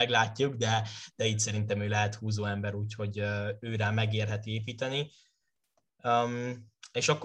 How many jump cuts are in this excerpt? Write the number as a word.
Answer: zero